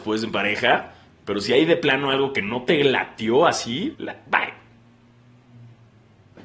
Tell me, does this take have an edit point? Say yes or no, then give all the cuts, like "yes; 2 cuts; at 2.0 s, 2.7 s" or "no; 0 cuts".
yes; 1 cut; at 3.9 s